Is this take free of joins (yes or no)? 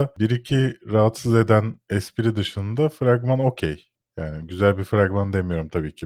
yes